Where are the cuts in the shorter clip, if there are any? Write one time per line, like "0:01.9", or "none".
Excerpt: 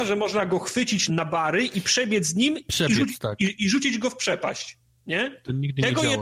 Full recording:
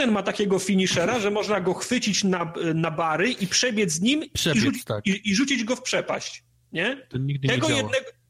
0:01.1